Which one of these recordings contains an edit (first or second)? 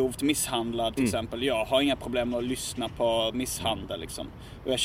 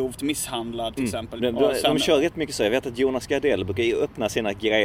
second